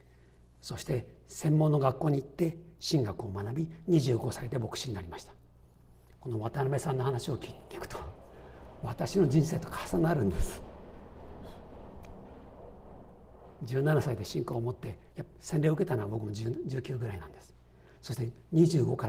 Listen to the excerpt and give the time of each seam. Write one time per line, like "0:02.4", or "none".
0:15.1